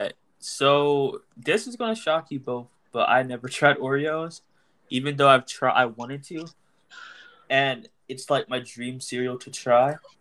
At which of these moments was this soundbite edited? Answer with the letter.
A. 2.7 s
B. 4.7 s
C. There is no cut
C